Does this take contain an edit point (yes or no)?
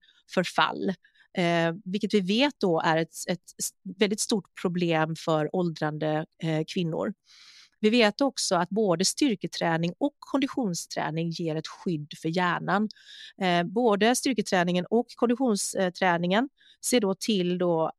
no